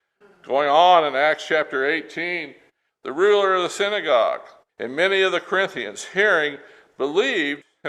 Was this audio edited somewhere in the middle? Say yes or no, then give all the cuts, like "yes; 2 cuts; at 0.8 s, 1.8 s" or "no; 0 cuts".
yes; 2 cuts; at 2.9 s, 4.7 s